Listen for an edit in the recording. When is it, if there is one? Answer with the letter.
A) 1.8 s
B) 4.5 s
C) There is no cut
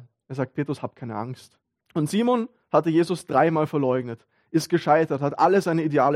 A